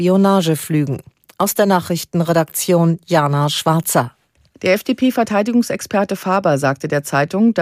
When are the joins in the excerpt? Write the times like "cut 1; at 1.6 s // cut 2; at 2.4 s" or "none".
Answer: none